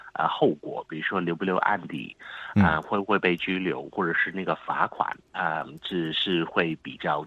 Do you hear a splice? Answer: no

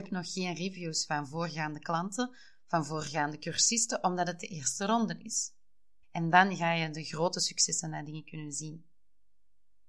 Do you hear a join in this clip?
yes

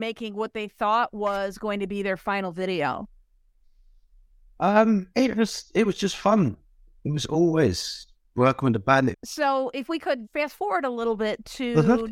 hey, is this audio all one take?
no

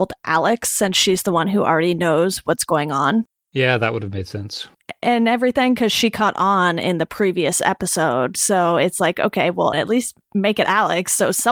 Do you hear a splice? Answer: yes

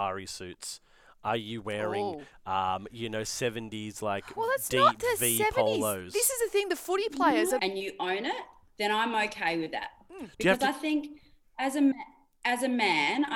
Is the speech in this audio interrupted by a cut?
yes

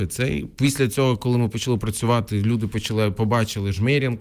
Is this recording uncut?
yes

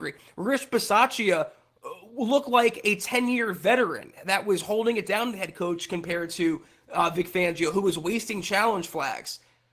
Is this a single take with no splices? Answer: yes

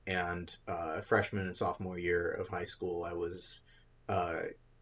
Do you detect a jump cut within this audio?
no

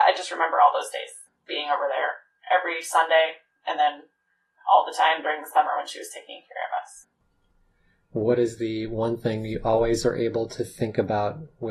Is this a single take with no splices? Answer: yes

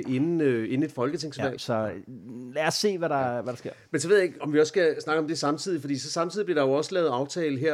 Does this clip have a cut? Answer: yes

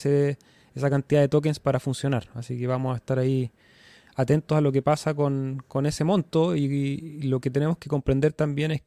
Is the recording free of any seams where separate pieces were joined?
yes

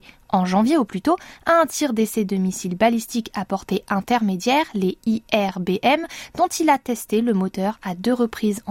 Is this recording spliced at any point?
no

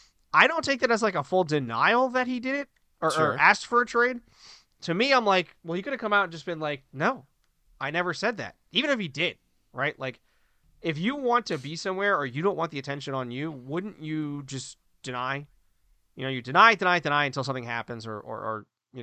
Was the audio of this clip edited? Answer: no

